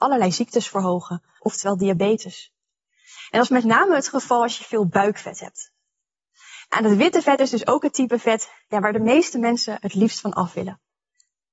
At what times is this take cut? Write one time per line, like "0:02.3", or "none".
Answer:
0:01.4